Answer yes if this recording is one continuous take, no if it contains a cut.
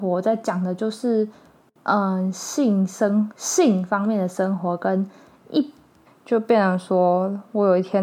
no